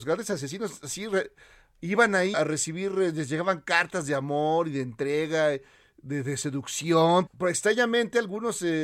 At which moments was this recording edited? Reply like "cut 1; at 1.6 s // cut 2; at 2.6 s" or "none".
cut 1; at 2.3 s // cut 2; at 7.3 s